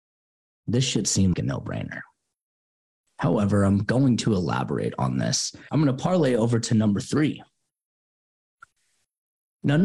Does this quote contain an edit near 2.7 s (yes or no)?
no